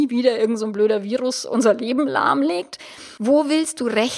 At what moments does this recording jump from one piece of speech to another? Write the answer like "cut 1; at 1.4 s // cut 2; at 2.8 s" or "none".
cut 1; at 3.2 s